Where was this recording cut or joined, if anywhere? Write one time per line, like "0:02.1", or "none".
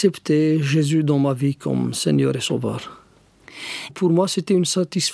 0:03.9